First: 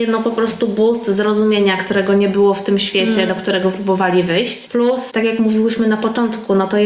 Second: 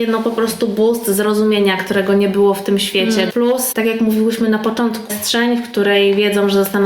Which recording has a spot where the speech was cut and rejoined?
second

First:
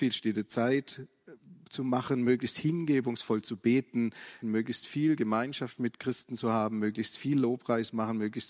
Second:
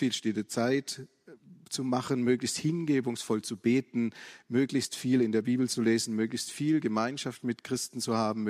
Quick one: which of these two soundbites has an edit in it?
first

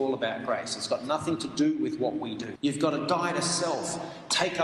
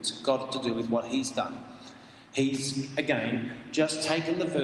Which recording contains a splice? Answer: first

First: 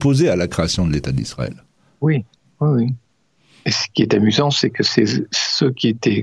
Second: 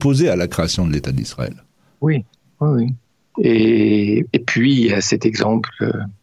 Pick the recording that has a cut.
second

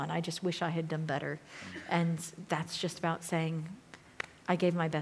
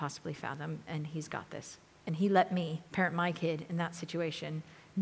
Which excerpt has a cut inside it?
second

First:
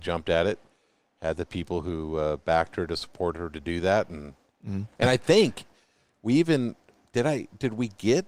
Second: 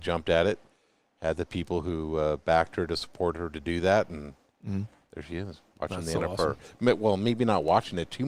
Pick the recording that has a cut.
first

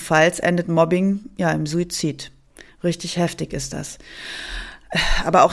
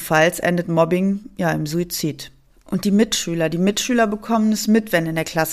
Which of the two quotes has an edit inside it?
second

